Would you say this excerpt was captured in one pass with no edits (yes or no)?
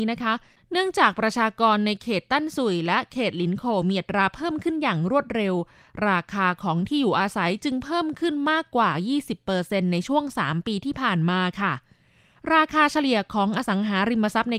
yes